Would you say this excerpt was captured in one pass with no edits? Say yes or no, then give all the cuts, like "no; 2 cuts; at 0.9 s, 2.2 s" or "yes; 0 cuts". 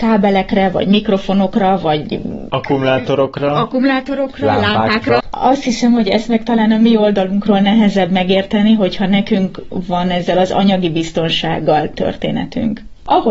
no; 1 cut; at 5.2 s